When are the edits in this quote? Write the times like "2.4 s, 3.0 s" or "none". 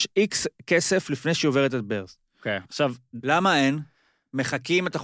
2.7 s

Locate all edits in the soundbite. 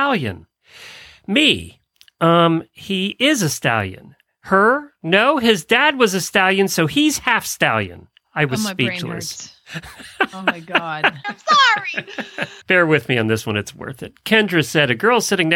11.2 s, 12.6 s

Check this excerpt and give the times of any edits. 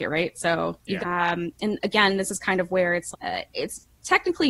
1.0 s, 3.1 s

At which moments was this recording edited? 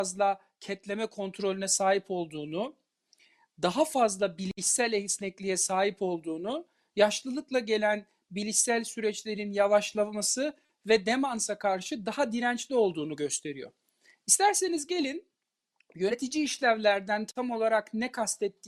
none

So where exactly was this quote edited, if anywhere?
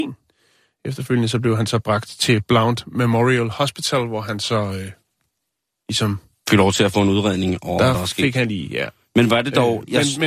none

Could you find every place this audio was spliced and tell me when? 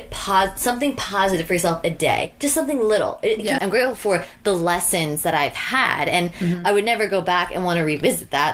3.6 s

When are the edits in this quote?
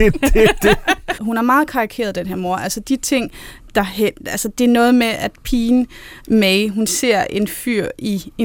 1.1 s

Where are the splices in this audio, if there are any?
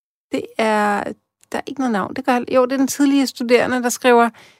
none

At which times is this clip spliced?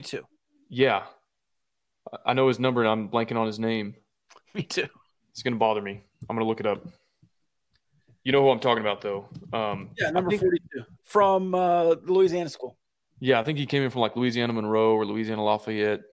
none

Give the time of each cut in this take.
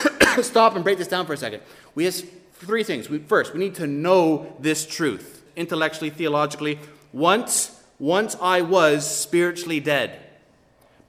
5.5 s

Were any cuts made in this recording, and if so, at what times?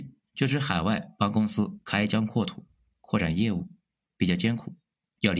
none

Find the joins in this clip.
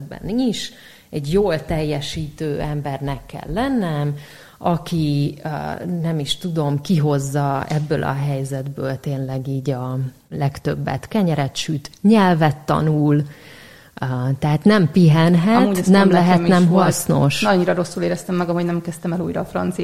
10.3 s

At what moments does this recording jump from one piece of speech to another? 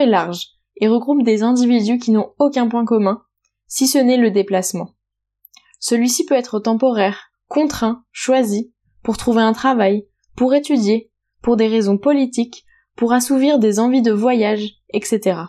7.3 s

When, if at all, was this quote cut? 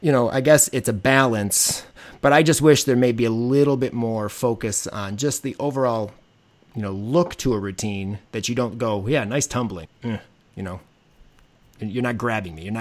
9.8 s

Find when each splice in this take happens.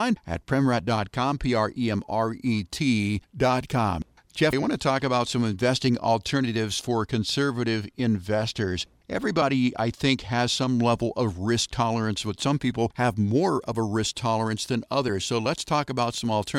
4.5 s

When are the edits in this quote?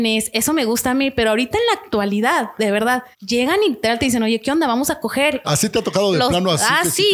3.1 s, 5.4 s

